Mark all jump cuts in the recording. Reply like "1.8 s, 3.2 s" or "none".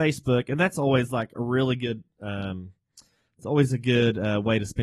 none

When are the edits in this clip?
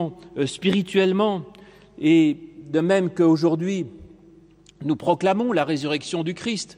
none

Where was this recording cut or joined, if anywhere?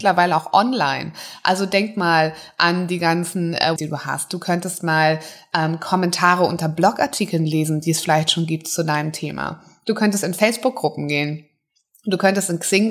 3.8 s

